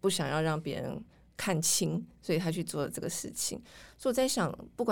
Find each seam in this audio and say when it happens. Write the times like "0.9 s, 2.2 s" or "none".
none